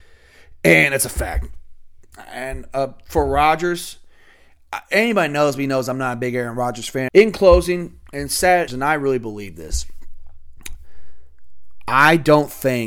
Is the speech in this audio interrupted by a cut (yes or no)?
yes